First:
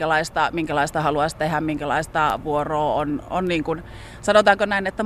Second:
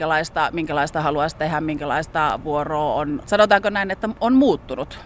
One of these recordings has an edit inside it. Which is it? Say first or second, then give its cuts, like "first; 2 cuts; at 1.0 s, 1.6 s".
second; 1 cut; at 3.2 s